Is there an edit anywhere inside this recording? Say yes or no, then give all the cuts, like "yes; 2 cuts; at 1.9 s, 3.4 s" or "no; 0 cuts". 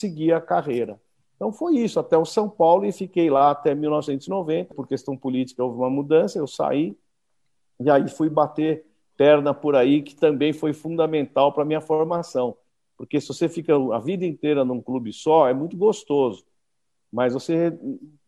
yes; 1 cut; at 4.7 s